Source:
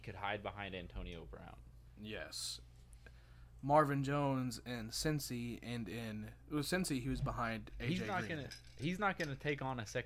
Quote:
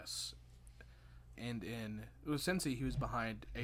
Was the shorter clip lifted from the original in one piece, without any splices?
no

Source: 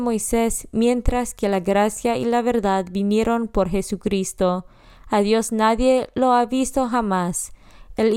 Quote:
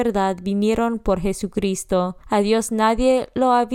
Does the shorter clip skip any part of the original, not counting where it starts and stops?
yes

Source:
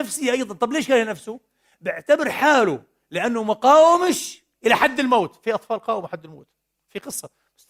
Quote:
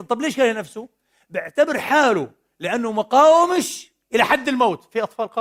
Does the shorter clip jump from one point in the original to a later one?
no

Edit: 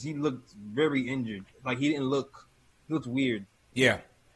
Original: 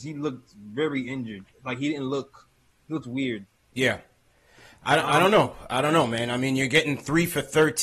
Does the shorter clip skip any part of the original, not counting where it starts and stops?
no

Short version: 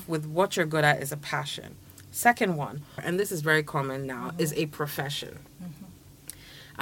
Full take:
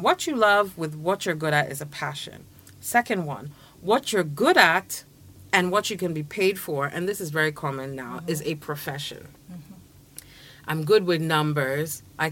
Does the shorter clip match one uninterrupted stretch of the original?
no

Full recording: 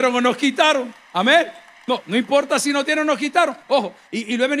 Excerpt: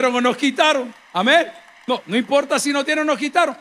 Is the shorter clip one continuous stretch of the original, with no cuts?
yes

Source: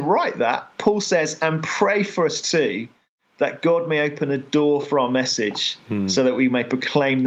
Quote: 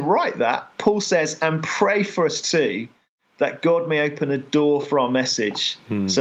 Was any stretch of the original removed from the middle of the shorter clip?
no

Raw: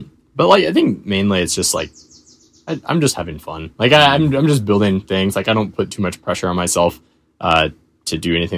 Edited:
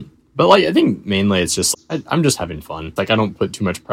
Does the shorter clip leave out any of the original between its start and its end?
yes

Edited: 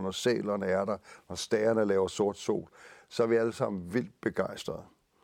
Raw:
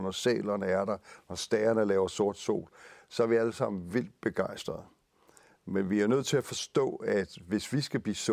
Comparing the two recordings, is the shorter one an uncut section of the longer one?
yes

